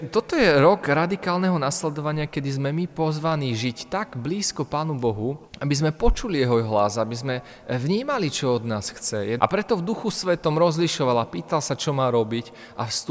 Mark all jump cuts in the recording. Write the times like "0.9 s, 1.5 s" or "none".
5.5 s, 9.4 s